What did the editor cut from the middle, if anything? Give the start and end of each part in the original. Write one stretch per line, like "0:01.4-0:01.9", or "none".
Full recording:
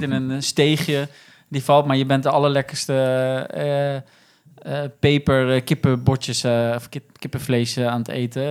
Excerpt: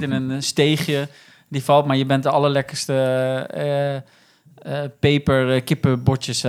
none